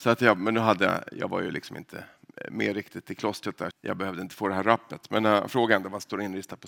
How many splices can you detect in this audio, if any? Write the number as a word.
one